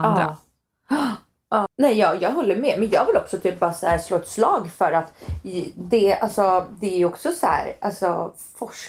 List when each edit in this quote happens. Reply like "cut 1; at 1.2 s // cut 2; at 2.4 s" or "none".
cut 1; at 1.7 s